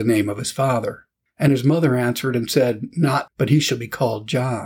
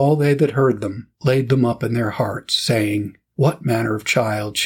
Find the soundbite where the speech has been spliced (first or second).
first